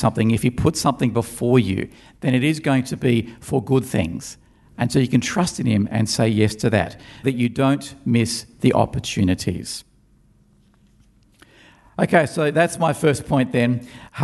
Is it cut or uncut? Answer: cut